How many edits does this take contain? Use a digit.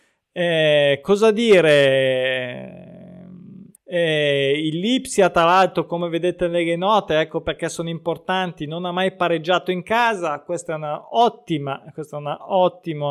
1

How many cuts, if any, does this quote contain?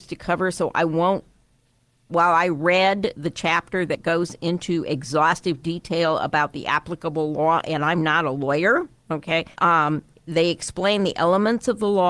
2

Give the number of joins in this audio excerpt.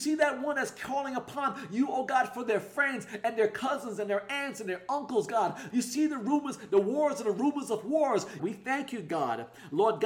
2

